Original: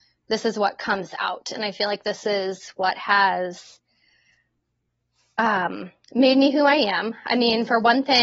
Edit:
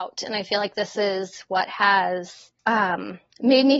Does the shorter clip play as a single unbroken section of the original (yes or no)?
no